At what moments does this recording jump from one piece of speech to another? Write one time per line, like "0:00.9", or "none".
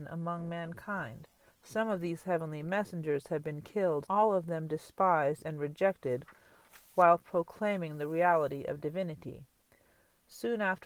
0:01.5
0:04.1

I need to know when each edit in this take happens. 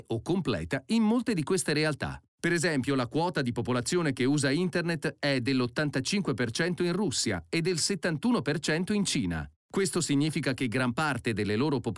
0:02.3
0:09.6

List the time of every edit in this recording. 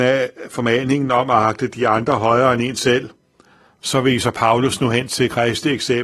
0:03.8

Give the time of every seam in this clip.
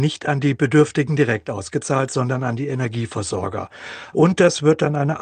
0:04.1

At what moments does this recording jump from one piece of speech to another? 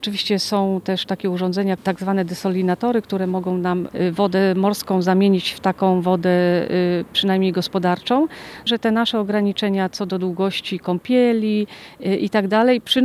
0:08.7

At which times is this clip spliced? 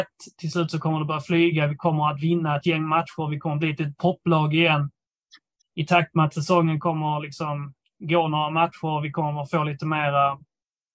0:05.6

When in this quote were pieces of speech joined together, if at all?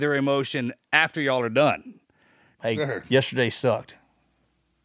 0:02.6

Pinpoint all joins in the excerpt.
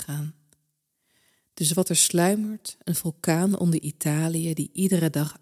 none

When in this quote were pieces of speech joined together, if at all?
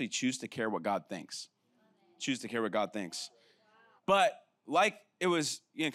0:04.0

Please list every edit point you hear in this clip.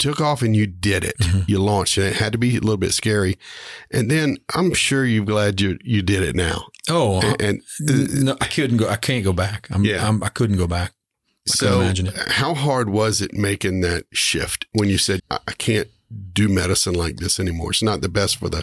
0:15.2

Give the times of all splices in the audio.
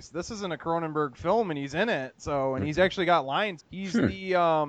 0:03.6

